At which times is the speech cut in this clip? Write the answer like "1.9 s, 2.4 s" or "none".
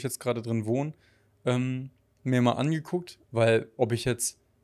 3.2 s